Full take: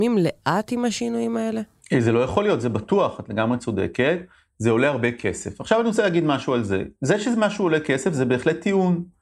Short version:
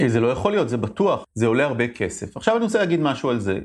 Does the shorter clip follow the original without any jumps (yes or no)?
no